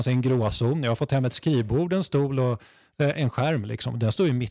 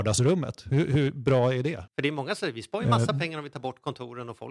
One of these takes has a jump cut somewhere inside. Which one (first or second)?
second